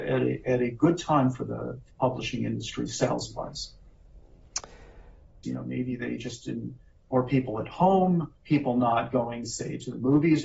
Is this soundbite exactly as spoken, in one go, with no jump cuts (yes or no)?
no